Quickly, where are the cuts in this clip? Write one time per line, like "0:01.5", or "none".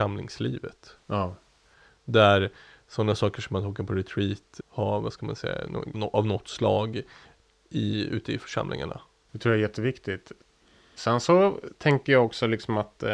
0:05.9